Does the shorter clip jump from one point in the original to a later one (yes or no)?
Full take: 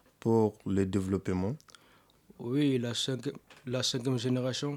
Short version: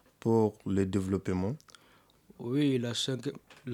no